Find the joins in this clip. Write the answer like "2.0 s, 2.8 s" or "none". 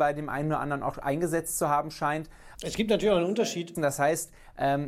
2.5 s, 3.7 s